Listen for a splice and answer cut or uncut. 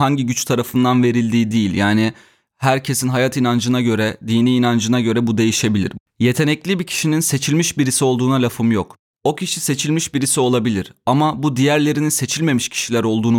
cut